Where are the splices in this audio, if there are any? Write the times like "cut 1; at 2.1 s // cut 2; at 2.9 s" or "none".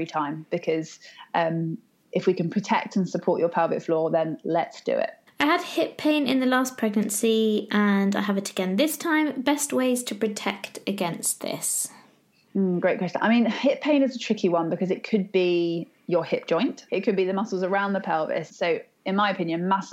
cut 1; at 5.3 s // cut 2; at 16.9 s // cut 3; at 18.5 s